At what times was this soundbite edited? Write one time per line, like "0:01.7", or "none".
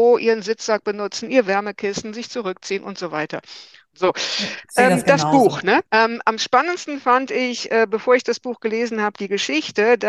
0:03.9
0:05.8